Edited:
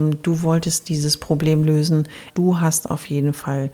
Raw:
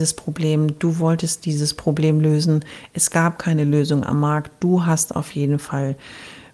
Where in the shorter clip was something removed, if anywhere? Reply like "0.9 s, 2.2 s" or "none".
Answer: 2.3 s